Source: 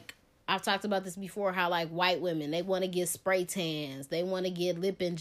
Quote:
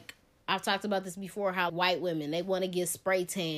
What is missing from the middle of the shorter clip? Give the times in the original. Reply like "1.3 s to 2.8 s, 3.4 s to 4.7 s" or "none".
1.7 s to 1.9 s